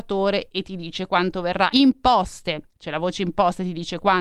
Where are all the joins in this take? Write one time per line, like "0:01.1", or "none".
0:01.7